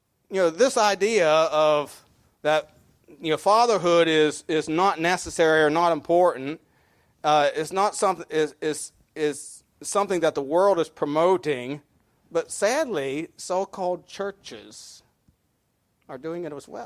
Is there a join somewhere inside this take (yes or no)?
no